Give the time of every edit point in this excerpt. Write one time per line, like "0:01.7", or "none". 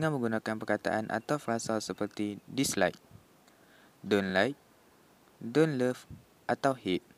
none